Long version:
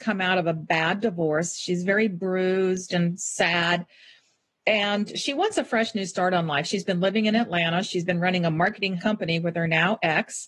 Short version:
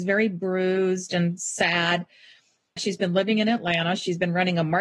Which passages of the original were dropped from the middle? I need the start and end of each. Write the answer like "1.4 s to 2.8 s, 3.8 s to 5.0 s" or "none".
4.6 s to 6.6 s

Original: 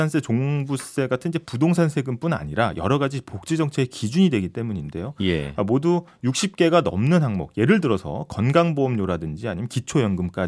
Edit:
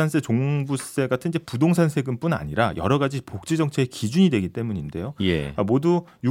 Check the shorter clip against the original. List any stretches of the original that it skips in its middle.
none

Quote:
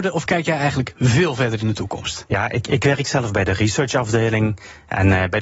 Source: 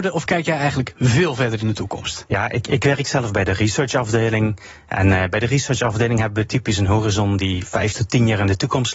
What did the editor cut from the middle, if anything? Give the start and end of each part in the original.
none

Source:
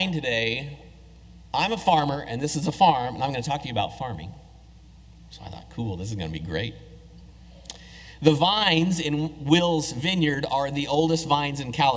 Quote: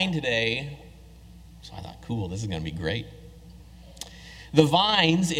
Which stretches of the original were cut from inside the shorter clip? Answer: 1.5 s to 5.2 s

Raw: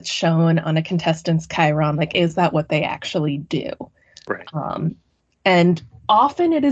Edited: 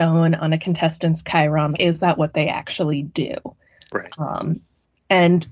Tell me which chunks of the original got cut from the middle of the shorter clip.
2.0 s to 2.1 s

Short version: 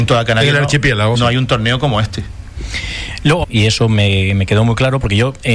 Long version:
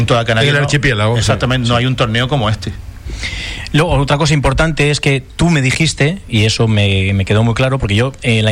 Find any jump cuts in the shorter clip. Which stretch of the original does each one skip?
1.1 s to 1.6 s, 3.9 s to 6.2 s

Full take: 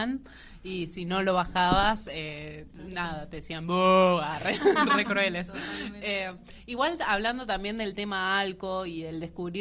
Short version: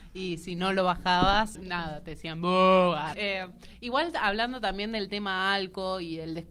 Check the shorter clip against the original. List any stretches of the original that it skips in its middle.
2.0 s to 2.8 s, 4.4 s to 6.0 s

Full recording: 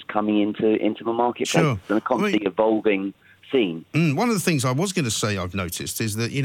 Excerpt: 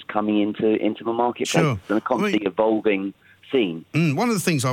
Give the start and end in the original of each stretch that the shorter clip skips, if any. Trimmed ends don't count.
none

